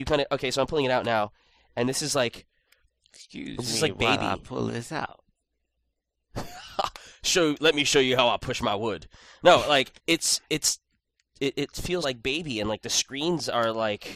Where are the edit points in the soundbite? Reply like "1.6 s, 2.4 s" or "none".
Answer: 10.0 s, 12.0 s

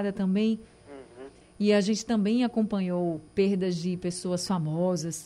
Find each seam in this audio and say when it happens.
1.4 s, 3.3 s

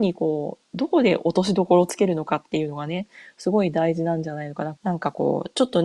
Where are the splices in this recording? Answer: 4.8 s

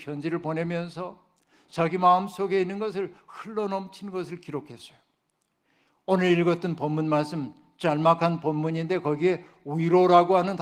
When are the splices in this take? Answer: none

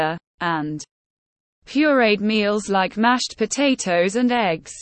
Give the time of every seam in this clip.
none

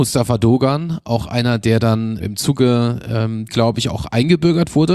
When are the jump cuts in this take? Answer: 2.2 s, 3.5 s

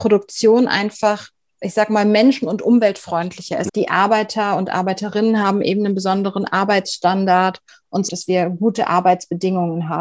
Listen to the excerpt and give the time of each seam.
3.7 s, 8.1 s

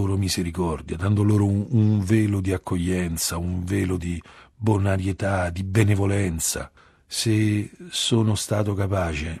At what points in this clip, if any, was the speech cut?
none

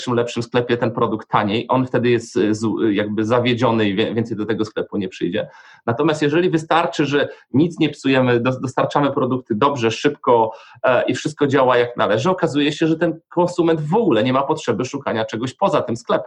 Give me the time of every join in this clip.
none

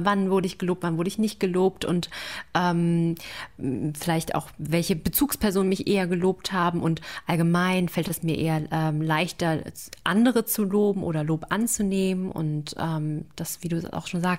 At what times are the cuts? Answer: none

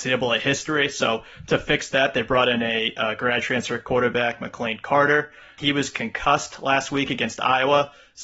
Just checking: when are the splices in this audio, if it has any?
none

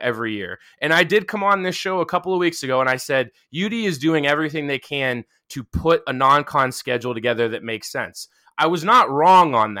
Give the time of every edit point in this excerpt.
none

